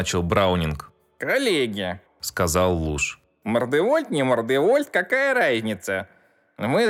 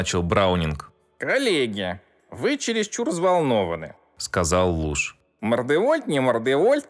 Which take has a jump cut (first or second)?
first